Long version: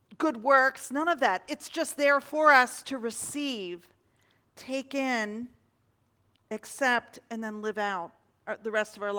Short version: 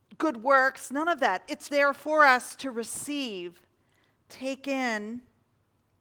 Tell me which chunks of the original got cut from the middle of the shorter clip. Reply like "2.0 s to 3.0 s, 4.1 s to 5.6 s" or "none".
1.7 s to 2.0 s